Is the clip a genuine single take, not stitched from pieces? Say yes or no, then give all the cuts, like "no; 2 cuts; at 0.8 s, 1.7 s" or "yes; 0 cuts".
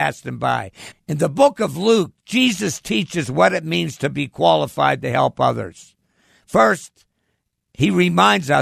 no; 1 cut; at 0.9 s